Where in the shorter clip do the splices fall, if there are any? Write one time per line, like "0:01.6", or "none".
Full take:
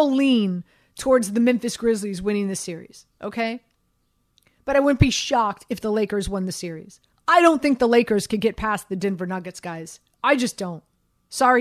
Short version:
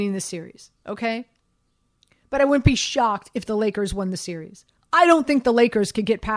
none